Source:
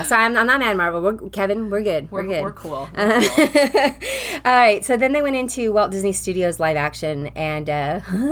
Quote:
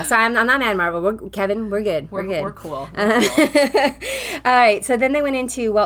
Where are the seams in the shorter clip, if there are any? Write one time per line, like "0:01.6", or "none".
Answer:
none